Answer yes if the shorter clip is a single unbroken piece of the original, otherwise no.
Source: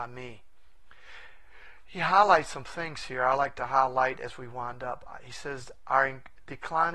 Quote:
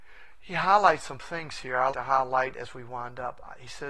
no